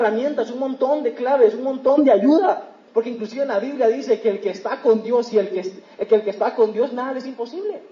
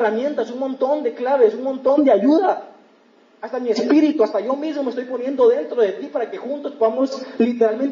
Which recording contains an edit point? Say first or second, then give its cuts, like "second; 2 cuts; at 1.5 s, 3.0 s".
first; 1 cut; at 2.9 s